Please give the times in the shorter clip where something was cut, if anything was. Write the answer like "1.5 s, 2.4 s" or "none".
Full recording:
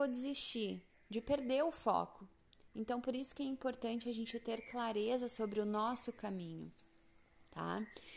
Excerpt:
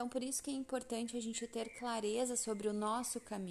none